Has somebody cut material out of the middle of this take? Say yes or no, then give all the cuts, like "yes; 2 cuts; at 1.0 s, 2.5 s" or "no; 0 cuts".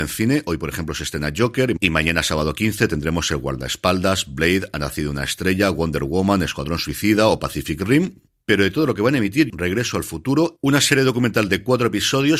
yes; 1 cut; at 9.5 s